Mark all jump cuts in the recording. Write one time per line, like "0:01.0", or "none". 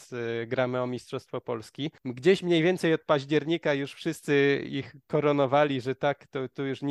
0:02.0